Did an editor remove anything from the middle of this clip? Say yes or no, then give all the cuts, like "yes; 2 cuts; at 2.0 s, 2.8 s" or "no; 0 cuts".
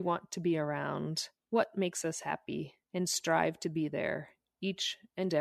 yes; 2 cuts; at 1.4 s, 2.8 s